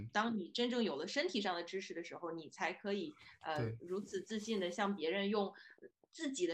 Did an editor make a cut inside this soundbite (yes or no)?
no